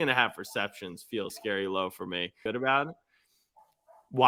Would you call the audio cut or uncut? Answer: cut